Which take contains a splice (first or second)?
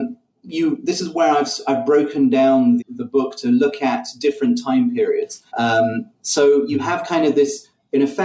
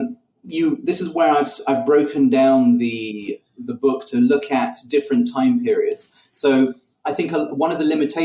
first